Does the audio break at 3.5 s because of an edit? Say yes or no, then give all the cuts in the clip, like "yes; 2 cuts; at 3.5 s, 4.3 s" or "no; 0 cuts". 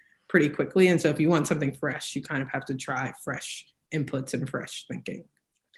no; 0 cuts